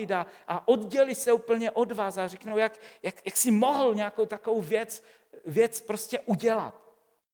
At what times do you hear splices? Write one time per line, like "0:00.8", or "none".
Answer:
none